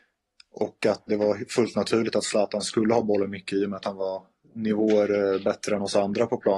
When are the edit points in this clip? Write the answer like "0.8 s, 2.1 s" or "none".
1.1 s